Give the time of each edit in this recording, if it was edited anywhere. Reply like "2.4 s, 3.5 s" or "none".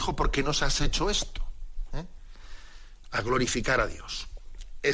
3.0 s